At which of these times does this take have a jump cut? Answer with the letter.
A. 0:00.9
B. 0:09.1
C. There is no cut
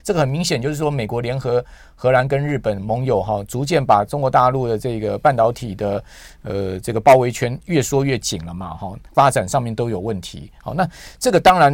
B